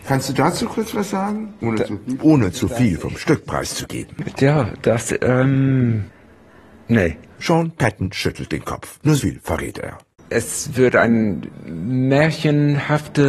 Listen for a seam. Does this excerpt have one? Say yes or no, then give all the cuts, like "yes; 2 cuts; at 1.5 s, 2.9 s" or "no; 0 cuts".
yes; 2 cuts; at 2.2 s, 9.2 s